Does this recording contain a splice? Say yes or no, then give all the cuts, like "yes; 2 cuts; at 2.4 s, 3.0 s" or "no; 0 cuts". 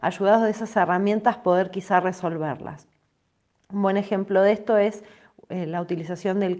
no; 0 cuts